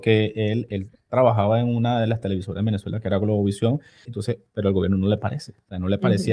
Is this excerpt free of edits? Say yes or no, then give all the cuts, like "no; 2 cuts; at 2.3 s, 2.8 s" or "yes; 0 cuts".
no; 1 cut; at 4.0 s